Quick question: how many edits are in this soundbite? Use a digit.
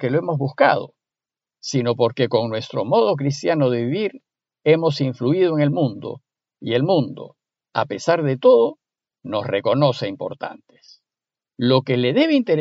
1